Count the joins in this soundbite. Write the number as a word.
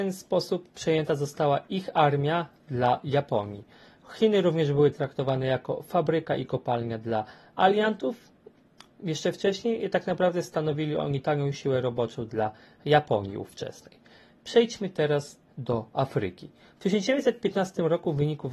zero